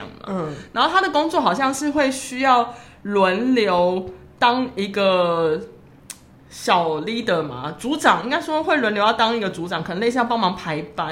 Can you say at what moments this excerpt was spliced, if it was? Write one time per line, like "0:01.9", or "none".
none